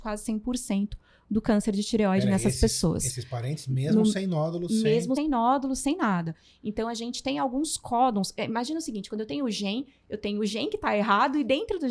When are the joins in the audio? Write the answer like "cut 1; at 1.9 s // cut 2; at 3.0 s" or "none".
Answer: cut 1; at 5.2 s